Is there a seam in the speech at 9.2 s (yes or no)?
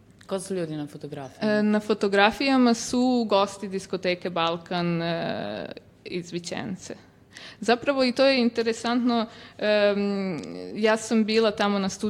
no